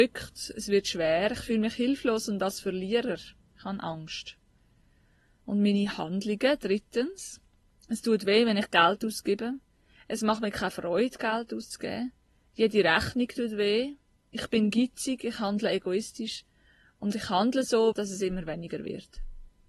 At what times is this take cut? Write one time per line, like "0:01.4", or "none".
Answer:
0:17.9